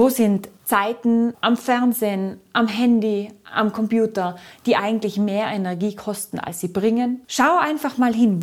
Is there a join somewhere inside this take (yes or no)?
yes